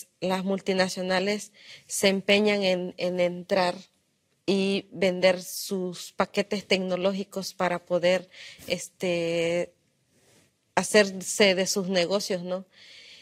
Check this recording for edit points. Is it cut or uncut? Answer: uncut